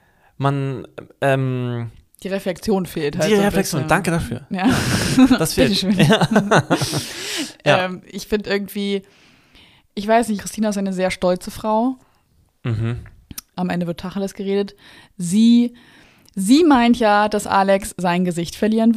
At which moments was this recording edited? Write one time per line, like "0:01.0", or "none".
0:08.4
0:10.4
0:13.5